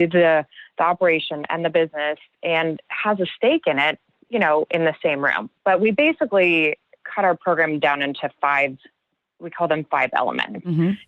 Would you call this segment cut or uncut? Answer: cut